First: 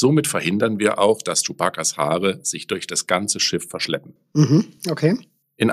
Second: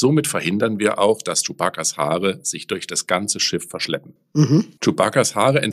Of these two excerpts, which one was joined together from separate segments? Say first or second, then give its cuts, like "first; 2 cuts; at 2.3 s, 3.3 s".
second; 1 cut; at 4.8 s